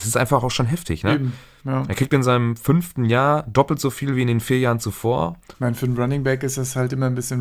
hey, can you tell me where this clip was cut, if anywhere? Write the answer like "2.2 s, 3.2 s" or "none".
5.5 s